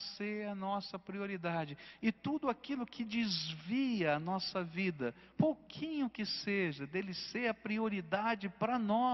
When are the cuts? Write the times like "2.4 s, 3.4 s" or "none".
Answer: 5.3 s